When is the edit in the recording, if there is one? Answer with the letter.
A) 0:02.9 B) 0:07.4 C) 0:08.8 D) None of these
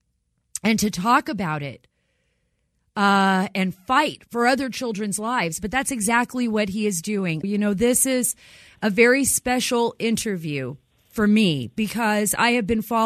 B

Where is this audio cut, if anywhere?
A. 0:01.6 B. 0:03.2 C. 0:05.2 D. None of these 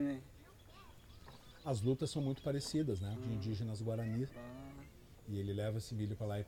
B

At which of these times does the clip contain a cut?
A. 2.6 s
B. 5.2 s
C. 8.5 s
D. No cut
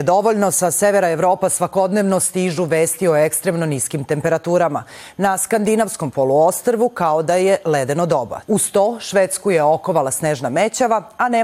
C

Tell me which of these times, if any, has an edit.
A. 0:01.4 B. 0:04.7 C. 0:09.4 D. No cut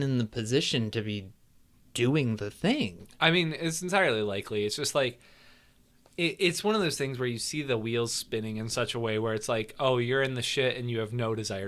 D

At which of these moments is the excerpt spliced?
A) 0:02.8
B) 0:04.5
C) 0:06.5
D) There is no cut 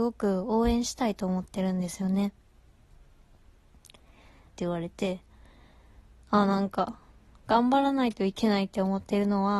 B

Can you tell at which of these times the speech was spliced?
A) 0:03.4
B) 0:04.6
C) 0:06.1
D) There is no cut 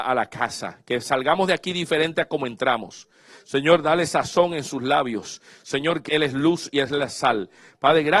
C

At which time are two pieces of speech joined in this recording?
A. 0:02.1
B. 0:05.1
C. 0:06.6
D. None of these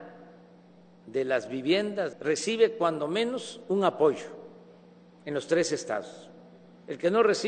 A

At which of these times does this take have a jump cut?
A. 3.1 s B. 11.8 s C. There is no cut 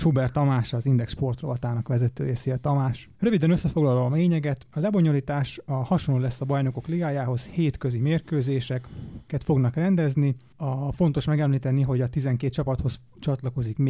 A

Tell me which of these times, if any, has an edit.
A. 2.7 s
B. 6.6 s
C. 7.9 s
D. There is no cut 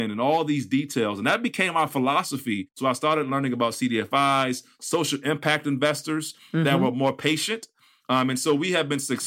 D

